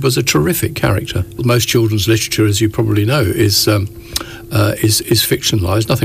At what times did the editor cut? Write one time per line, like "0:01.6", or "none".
0:01.4